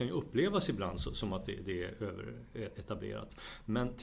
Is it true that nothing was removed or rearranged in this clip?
yes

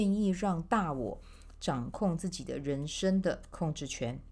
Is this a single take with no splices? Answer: yes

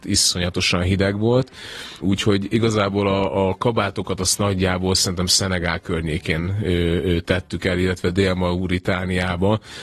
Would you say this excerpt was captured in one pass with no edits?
yes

